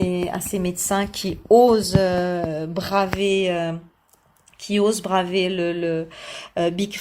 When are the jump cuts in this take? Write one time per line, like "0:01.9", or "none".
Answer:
none